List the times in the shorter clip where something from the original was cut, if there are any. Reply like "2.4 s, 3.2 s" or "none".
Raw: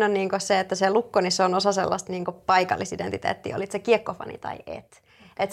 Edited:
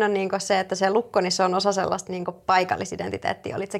none